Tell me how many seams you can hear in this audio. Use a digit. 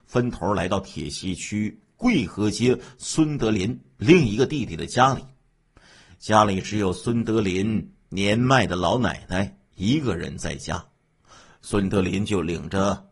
0